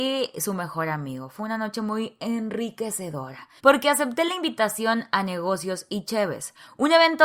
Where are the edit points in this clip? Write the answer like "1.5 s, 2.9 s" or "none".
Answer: 3.6 s